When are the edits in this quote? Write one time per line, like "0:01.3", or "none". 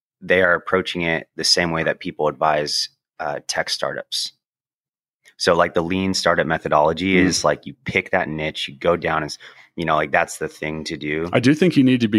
none